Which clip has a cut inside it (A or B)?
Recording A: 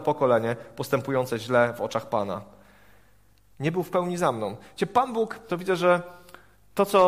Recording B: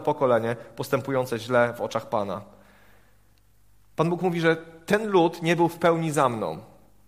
A